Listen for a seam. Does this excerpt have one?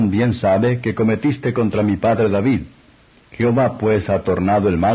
no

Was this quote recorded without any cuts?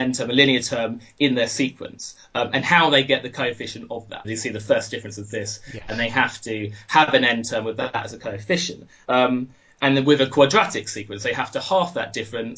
no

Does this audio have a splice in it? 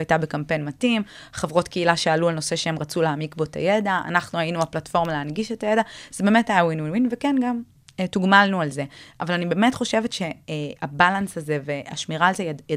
no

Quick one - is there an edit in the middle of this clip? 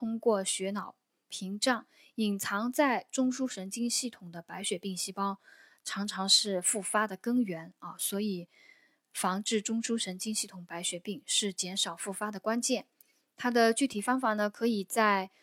no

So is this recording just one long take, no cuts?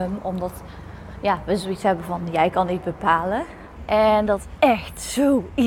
no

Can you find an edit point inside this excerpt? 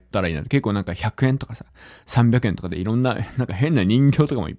no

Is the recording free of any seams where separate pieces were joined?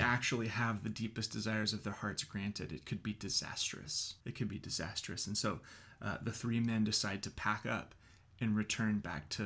no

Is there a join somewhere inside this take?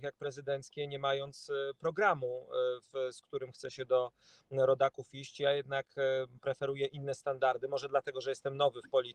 no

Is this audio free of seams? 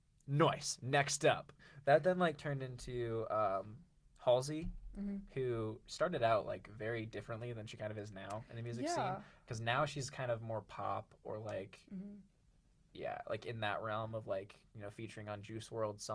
no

